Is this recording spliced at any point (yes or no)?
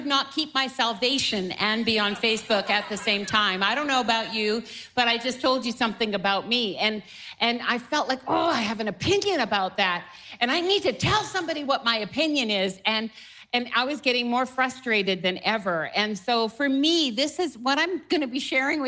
no